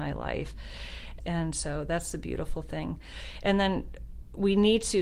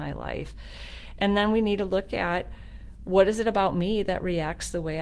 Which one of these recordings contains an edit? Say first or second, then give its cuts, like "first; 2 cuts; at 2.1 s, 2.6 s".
first; 1 cut; at 1.2 s